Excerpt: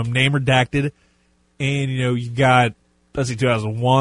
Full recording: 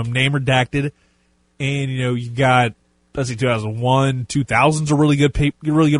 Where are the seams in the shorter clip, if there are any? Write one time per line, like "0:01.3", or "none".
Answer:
none